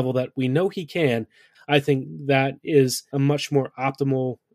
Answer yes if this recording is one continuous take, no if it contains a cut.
no